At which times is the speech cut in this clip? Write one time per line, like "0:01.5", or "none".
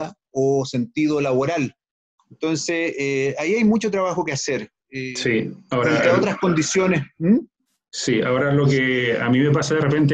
none

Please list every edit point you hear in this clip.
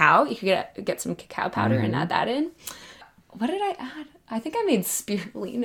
0:03.0

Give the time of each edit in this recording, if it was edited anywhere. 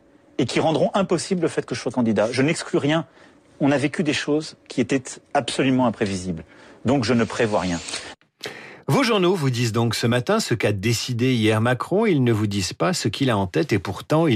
none

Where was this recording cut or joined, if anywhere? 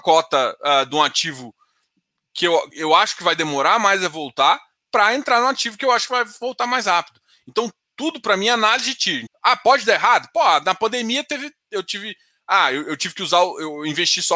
0:02.7
0:09.3

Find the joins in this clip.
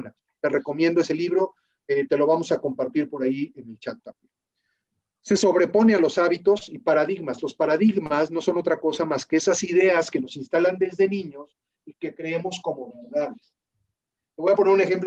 none

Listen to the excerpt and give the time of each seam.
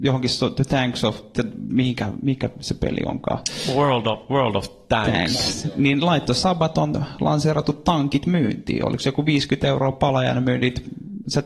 none

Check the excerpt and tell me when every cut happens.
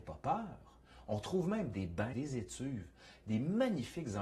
0:02.1

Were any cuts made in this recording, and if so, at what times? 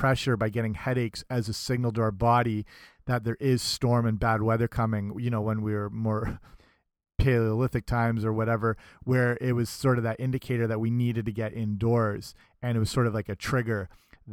none

